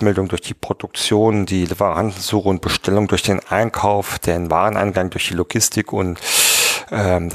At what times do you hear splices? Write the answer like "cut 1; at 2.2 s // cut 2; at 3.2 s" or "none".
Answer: none